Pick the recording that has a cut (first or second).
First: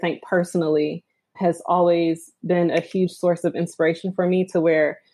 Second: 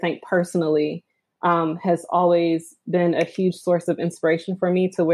first